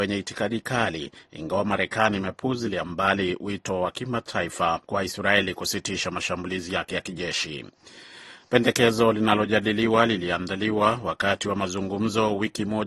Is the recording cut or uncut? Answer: cut